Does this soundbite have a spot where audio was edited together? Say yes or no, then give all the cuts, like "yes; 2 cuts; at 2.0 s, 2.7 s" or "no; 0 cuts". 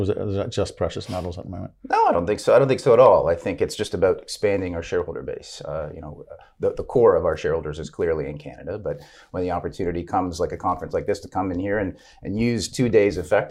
no; 0 cuts